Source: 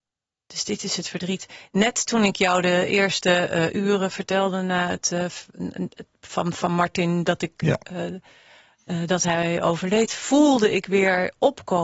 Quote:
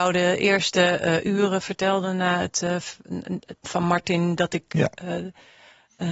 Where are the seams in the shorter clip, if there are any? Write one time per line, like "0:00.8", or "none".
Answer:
0:03.6